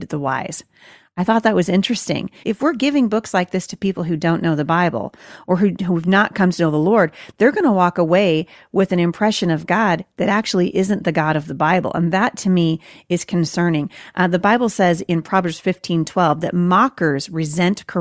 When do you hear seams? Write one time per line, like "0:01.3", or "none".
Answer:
0:02.4